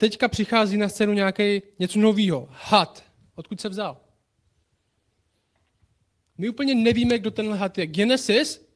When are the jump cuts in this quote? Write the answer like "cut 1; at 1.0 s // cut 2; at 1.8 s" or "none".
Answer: cut 1; at 3.3 s